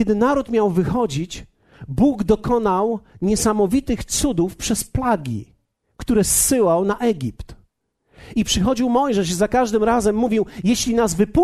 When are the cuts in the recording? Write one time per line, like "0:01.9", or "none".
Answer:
none

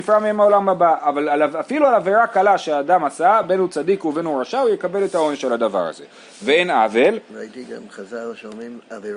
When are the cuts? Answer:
none

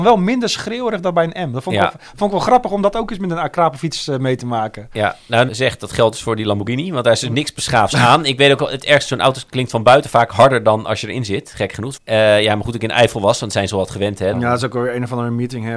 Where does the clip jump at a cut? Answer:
0:05.5
0:12.0
0:14.3

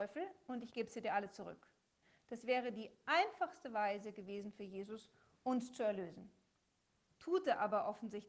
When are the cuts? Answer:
none

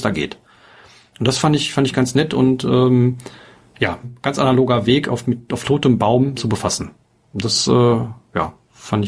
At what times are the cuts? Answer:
0:04.0
0:06.4

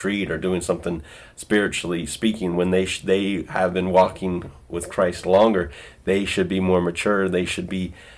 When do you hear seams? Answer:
0:02.5

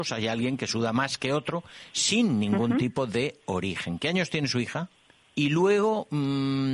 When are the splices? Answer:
0:05.3

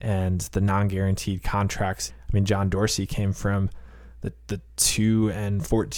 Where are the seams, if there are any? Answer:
0:02.1

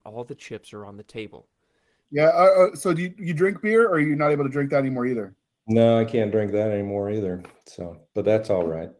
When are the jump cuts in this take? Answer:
0:02.0

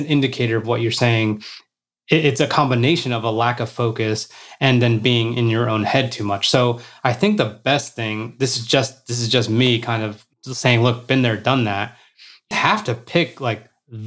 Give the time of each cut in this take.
0:10.3
0:12.5

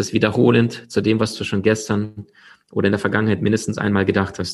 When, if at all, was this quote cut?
none

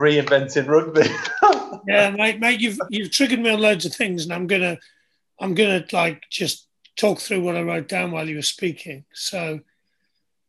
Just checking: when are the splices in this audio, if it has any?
none

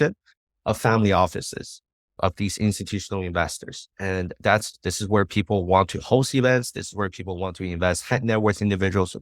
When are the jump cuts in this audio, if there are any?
0:03.9

